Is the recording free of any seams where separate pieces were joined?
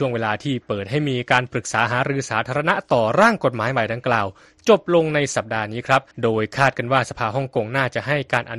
no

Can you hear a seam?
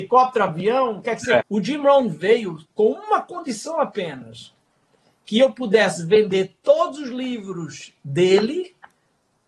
yes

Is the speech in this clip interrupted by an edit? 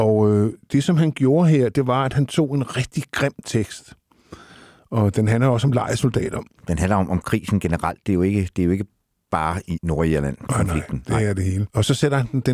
no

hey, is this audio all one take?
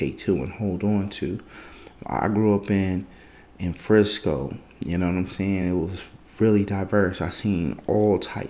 yes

